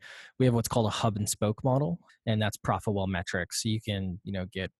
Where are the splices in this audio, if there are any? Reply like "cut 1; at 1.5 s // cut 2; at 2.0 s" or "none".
cut 1; at 2.1 s

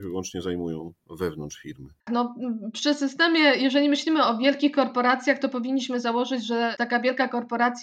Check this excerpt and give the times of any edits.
cut 1; at 2.1 s

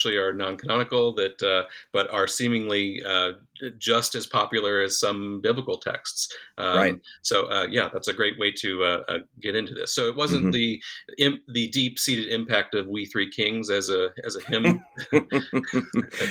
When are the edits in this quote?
none

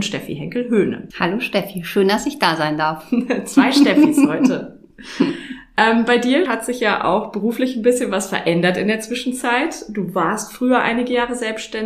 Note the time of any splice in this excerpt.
cut 1; at 1.1 s // cut 2; at 6.5 s

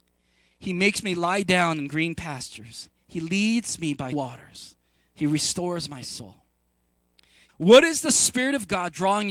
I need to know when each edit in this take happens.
cut 1; at 4.1 s // cut 2; at 7.5 s

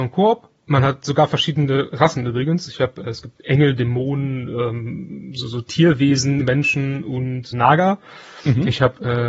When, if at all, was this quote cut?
cut 1; at 6.4 s // cut 2; at 7.5 s

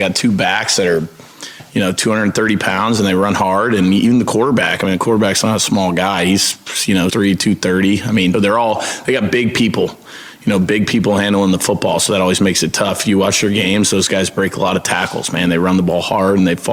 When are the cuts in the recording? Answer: cut 1; at 7.1 s // cut 2; at 8.3 s

